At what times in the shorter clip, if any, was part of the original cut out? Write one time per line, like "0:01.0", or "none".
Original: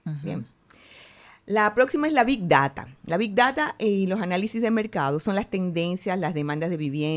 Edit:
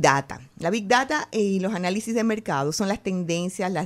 none